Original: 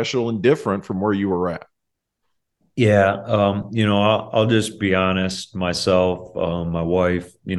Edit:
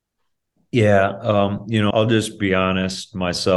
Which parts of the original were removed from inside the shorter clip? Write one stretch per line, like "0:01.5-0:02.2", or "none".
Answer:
0:03.9-0:04.3